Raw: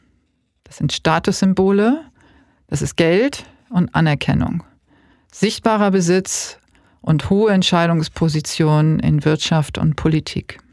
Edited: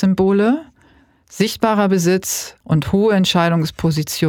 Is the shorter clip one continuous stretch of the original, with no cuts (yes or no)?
no